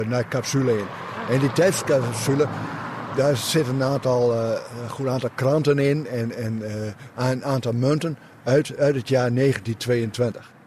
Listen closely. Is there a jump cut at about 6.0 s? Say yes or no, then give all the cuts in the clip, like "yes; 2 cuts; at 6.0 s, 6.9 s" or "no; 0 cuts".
no; 0 cuts